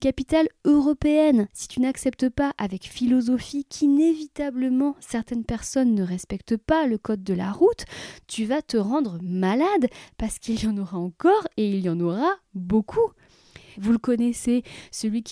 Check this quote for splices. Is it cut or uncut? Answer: cut